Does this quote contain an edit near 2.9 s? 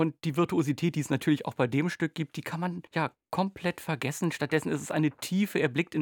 yes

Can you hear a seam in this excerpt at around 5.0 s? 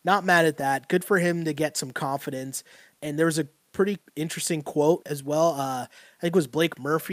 yes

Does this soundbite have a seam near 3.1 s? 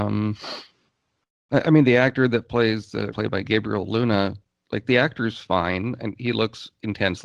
yes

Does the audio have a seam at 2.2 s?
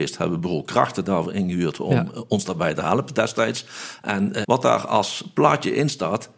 no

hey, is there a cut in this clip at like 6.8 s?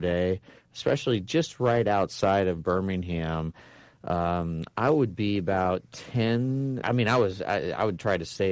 yes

